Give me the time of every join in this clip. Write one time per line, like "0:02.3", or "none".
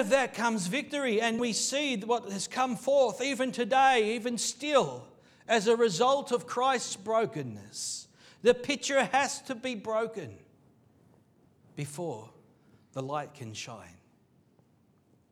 0:01.4